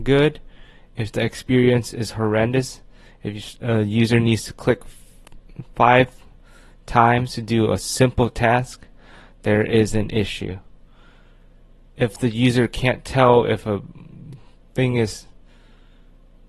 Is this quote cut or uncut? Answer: uncut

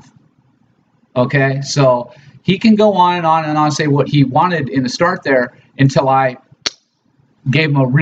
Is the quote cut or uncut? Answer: cut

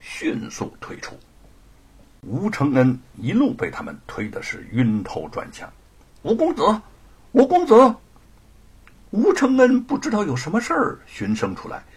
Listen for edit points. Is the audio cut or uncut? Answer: cut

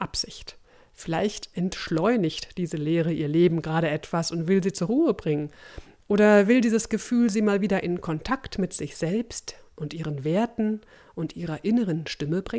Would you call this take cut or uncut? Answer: uncut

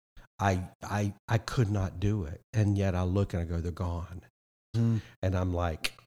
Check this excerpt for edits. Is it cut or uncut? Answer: cut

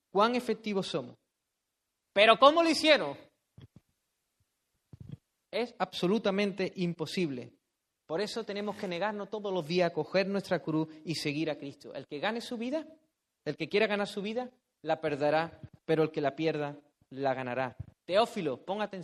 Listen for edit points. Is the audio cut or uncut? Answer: cut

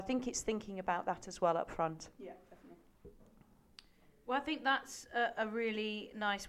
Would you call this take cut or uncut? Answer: uncut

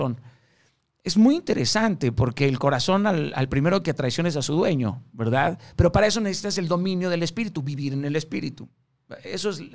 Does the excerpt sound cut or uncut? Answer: uncut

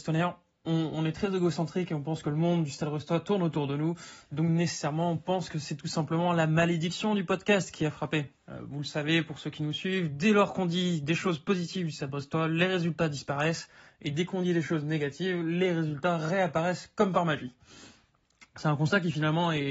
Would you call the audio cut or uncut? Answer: cut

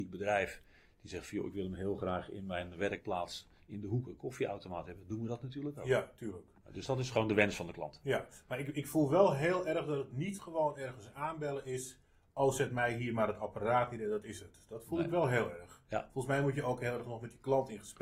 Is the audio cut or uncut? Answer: uncut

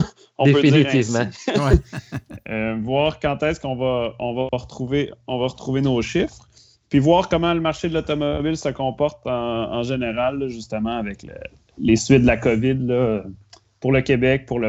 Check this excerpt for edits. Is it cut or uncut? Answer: uncut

